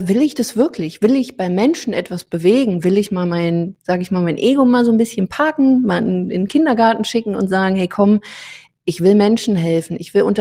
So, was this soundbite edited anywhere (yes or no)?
no